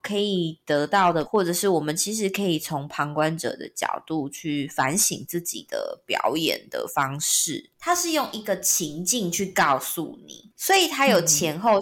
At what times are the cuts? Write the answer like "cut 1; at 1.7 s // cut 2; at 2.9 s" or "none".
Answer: cut 1; at 1.2 s // cut 2; at 7.7 s